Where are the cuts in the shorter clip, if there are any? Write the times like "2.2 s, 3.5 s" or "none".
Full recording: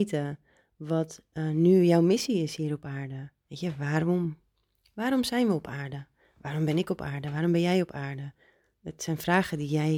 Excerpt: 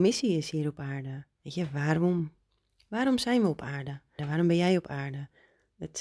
4.2 s